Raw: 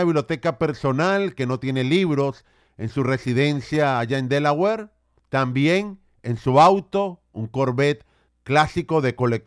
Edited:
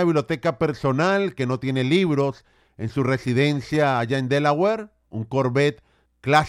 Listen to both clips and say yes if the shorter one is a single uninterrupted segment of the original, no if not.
no